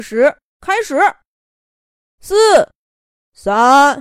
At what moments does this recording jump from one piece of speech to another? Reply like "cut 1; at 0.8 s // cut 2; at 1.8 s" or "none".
cut 1; at 2.0 s